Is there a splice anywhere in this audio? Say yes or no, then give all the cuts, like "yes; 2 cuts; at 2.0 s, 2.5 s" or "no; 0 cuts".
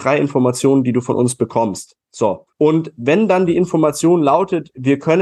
yes; 1 cut; at 2.5 s